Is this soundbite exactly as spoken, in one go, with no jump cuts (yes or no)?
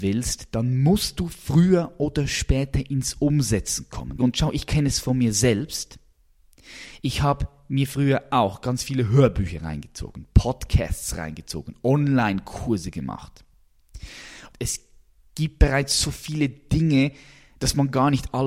no